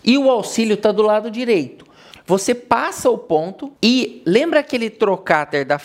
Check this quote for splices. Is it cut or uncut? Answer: cut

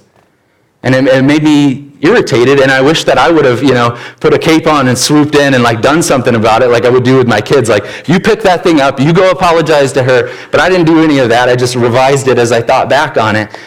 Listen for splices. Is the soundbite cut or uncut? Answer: uncut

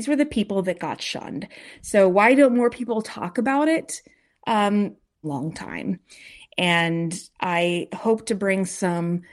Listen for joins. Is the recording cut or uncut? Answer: cut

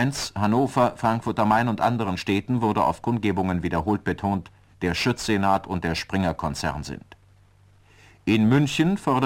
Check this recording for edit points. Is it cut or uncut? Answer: cut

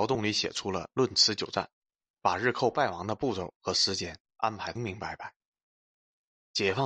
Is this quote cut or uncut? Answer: cut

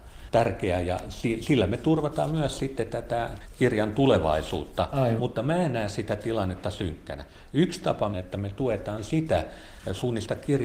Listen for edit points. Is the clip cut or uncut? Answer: cut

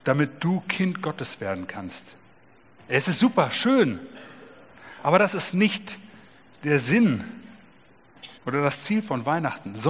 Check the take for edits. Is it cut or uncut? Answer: cut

